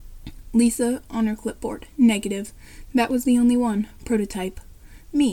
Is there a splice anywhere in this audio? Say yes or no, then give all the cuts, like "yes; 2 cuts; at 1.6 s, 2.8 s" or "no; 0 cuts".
no; 0 cuts